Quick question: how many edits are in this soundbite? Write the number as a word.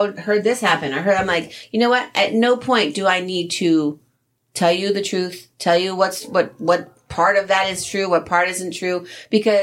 zero